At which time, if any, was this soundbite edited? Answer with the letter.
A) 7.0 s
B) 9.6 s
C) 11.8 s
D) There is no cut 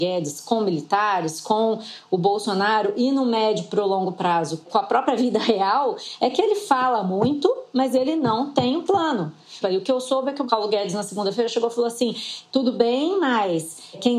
B